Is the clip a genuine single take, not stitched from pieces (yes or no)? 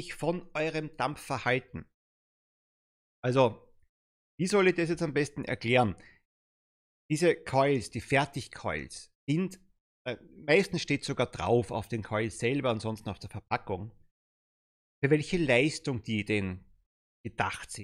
yes